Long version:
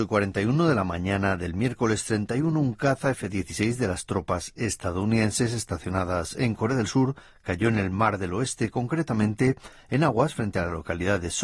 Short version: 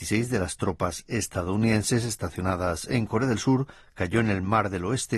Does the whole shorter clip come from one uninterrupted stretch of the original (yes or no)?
yes